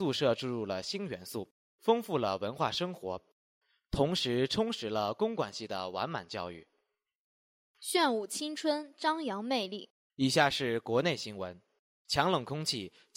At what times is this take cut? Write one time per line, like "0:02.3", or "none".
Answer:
0:10.1